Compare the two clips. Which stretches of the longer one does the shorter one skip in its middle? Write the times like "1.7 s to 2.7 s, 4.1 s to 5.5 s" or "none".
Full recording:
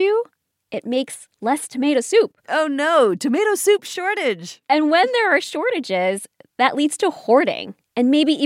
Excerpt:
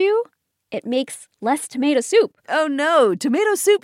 none